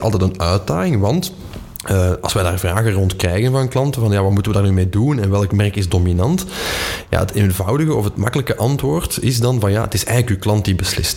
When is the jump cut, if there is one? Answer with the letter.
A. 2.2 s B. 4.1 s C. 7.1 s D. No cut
D